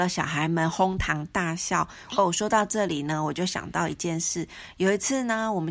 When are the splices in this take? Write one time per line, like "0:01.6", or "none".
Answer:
0:02.1